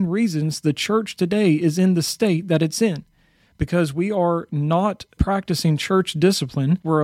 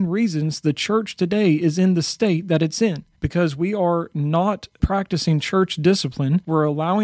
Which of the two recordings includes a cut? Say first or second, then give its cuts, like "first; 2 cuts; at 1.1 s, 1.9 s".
second; 1 cut; at 3.1 s